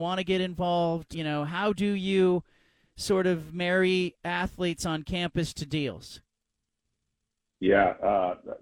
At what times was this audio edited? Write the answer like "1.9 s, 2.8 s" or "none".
1.1 s